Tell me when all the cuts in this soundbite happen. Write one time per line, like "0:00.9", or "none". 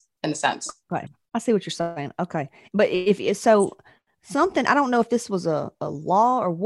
none

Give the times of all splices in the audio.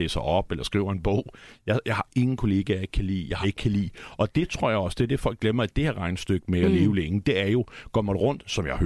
0:03.4

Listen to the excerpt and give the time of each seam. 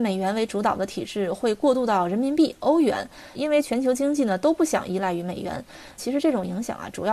0:03.3
0:06.0

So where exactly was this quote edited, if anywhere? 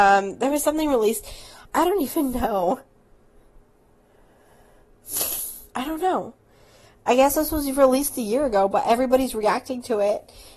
0:01.6
0:05.7

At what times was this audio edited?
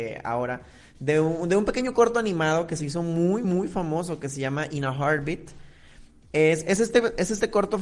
none

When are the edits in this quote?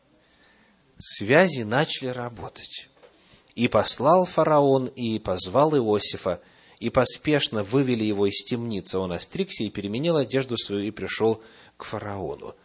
0:03.5

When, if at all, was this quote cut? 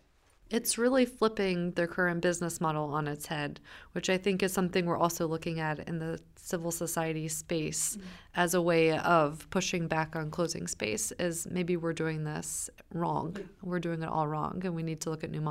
none

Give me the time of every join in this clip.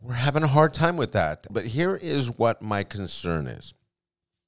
0:01.5

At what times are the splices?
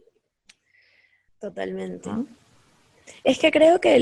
0:01.3

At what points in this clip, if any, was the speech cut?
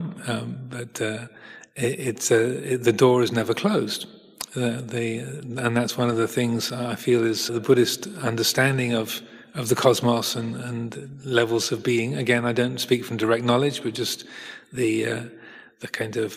0:07.5

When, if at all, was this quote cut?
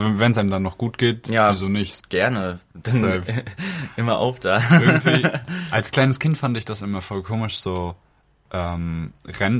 0:02.0

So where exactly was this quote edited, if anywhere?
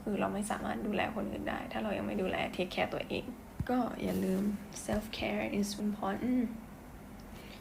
0:05.8

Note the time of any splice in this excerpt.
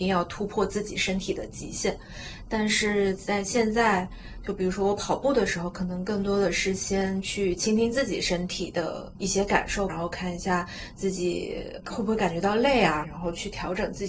0:09.9
0:13.0

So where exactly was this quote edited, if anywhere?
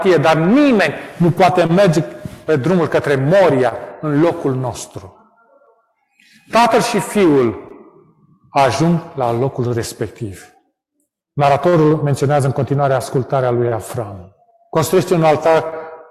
none

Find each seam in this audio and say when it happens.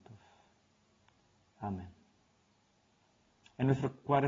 none

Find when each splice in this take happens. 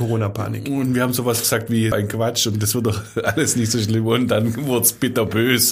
0:01.9

